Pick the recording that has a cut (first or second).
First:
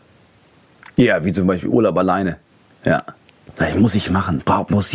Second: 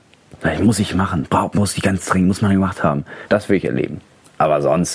second